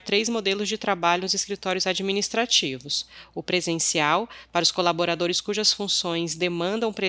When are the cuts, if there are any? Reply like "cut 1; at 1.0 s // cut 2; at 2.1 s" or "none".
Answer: none